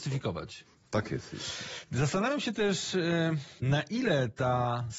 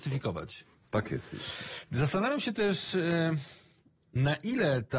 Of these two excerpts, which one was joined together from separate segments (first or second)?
first